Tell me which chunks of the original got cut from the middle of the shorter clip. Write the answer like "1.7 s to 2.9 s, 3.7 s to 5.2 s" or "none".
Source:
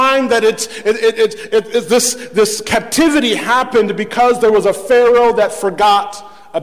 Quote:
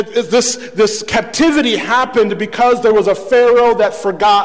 none